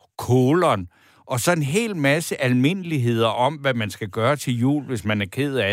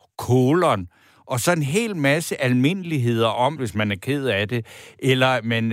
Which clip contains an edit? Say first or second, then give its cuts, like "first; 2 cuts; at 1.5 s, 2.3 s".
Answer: second; 1 cut; at 3.6 s